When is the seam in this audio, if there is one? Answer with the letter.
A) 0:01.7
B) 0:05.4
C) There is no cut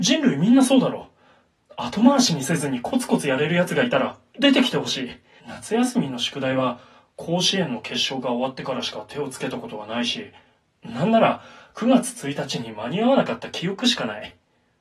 B